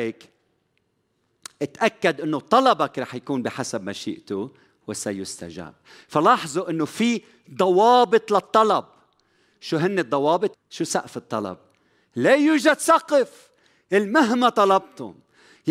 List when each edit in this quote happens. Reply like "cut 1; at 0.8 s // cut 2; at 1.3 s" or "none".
cut 1; at 10.5 s